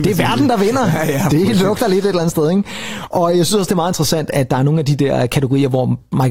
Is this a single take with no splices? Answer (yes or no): yes